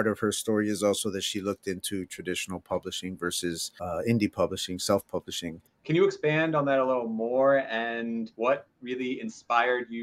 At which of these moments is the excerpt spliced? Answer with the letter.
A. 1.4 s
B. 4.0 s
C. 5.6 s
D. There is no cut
C